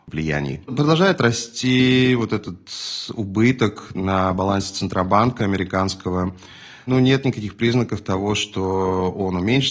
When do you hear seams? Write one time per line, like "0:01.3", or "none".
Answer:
none